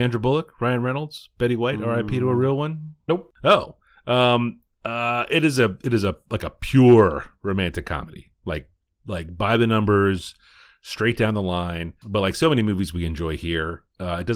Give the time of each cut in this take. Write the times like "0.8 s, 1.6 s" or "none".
none